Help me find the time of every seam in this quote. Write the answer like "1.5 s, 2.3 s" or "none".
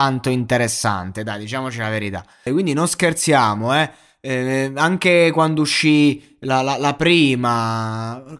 2.5 s